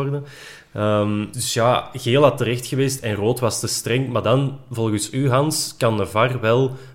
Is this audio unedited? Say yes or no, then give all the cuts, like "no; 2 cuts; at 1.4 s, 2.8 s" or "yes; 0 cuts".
no; 1 cut; at 1.3 s